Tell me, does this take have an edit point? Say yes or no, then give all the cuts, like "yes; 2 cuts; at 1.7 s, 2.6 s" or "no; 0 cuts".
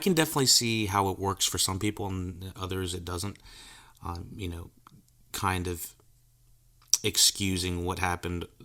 no; 0 cuts